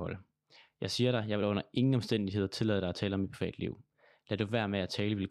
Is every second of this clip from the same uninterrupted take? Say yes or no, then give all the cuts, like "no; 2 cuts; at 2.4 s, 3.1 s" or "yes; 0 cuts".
yes; 0 cuts